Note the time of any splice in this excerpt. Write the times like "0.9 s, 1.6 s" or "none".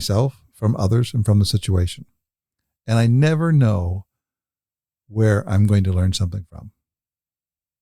none